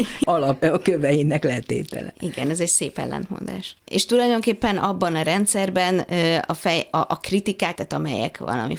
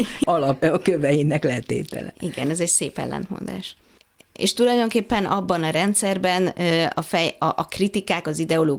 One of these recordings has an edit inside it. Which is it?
first; 2 cuts; at 3.8 s, 7.7 s

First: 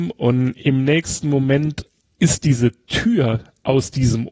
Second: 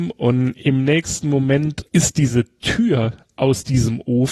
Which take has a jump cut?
second; 1 cut; at 1.9 s

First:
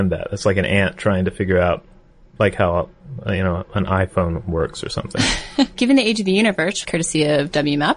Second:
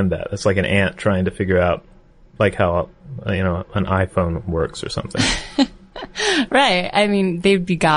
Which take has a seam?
first; 2 cuts; at 5.7 s, 6.8 s

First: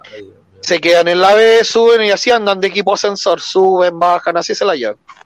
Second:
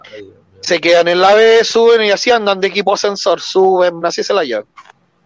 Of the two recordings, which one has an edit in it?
second; 1 cut; at 4.0 s

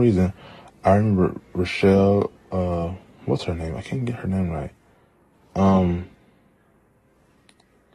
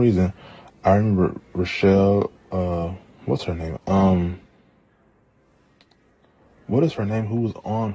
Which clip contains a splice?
second; 1 cut; at 3.8 s

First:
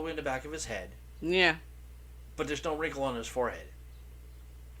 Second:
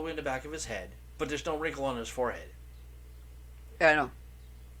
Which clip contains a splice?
second; 2 cuts; at 1.2 s, 3.8 s

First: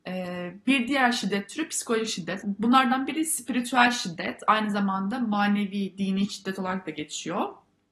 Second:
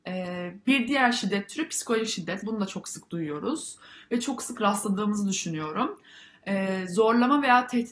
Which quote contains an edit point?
first; 1 cut; at 2.4 s

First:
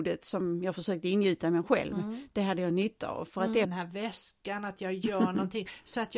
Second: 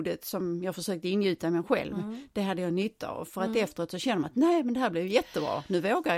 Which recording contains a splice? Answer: first; 1 cut; at 3.6 s

